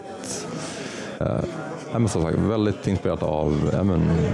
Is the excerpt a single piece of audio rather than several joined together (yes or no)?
no